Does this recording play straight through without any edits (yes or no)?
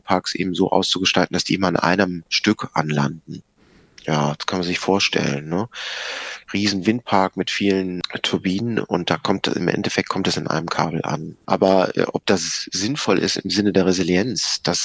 no